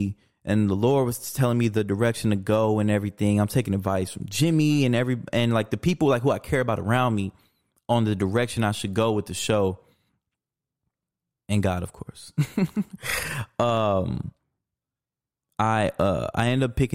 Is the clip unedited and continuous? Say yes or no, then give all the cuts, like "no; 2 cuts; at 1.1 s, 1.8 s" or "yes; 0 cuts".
yes; 0 cuts